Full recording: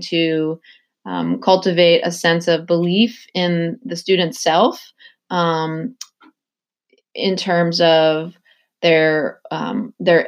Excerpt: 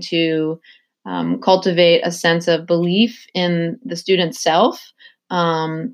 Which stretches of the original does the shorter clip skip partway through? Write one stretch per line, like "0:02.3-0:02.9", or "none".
none

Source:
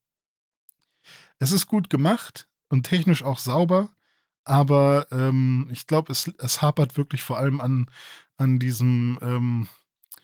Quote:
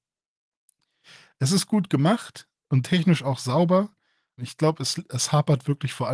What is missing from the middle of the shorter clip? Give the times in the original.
0:04.4-0:05.7

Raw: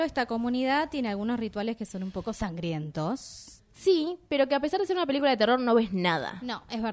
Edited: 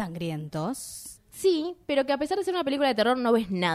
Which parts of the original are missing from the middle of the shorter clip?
none

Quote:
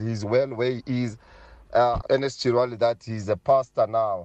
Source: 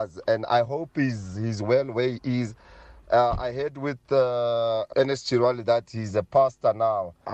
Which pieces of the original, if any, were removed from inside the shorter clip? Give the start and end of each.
0:03.4-0:04.9

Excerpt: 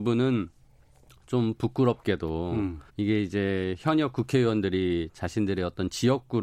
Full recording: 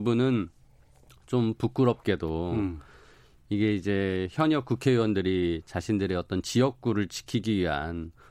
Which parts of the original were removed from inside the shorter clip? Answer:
0:02.9-0:03.4

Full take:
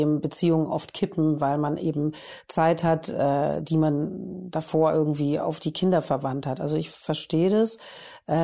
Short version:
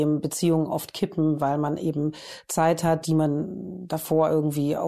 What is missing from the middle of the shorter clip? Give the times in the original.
0:03.0-0:03.6

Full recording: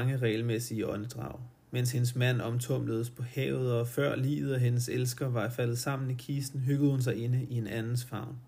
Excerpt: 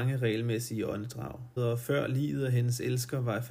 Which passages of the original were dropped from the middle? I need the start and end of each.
0:01.6-0:03.6

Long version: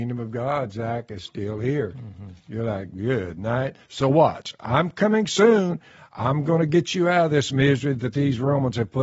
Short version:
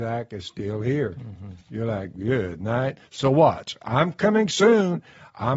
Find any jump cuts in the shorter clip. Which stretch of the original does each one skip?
none

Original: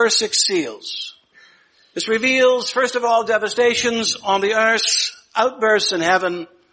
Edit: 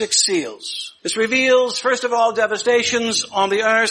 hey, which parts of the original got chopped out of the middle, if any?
0:01.2-0:01.9

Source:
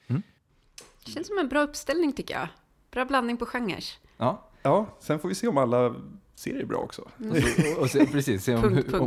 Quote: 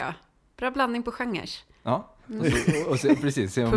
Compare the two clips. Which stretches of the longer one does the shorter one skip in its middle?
0:04.6-0:07.1

